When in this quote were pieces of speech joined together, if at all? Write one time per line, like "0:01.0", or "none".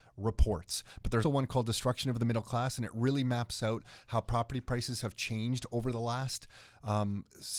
0:01.2